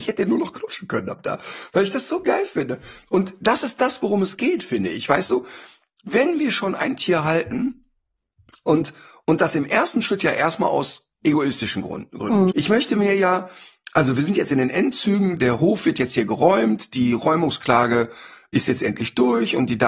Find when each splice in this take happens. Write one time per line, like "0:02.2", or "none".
0:12.5
0:15.4